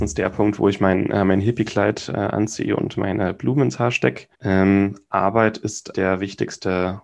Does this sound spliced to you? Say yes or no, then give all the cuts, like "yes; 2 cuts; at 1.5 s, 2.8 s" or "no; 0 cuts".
yes; 2 cuts; at 4.3 s, 5.9 s